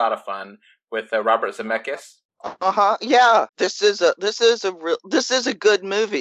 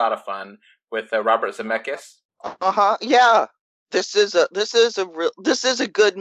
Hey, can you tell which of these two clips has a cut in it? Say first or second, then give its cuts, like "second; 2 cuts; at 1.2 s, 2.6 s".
first; 1 cut; at 3.5 s